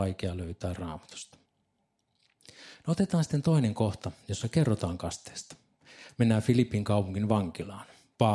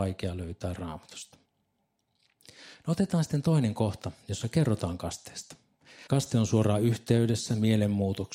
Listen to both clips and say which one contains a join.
second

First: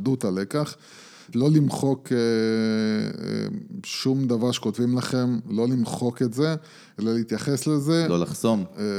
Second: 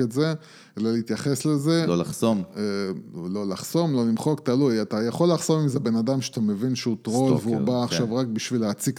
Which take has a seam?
first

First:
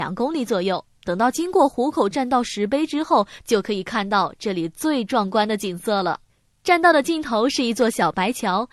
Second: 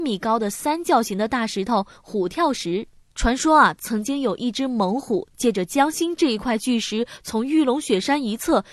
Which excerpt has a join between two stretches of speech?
first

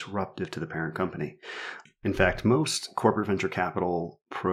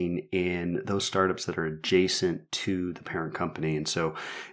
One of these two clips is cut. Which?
first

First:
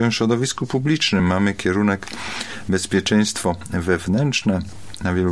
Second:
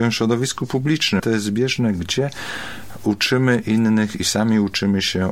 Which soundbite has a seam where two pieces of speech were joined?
second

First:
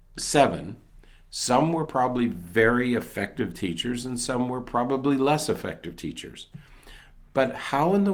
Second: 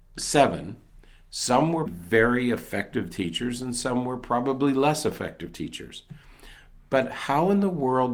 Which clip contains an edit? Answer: second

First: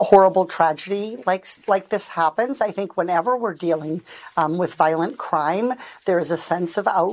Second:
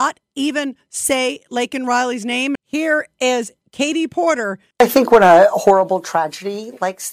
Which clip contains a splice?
second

